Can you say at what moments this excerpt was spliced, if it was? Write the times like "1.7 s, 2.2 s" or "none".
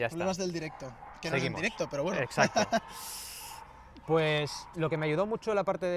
4.7 s